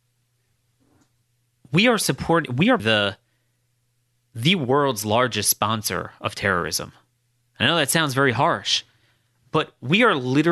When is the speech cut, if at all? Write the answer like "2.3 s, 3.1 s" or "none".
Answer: 2.8 s